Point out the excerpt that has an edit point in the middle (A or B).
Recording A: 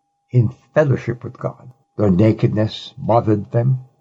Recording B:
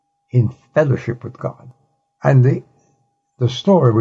A